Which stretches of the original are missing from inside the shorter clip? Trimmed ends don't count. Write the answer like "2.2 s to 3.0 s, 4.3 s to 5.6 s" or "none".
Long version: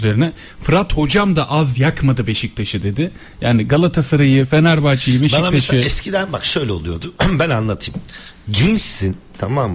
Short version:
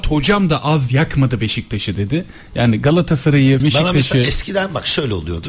4.5 s to 5.2 s